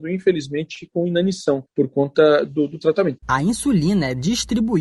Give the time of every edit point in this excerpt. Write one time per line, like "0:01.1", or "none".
0:03.2